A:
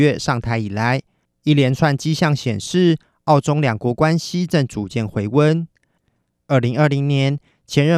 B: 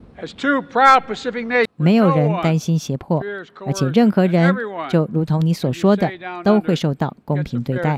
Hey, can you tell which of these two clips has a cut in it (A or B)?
B